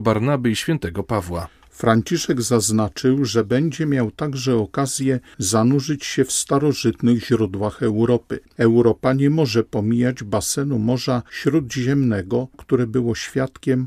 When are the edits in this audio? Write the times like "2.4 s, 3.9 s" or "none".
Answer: 8.4 s, 12.5 s